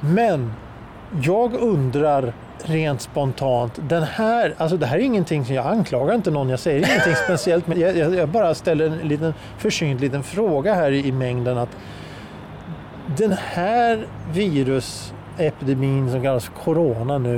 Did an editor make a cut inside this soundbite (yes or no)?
yes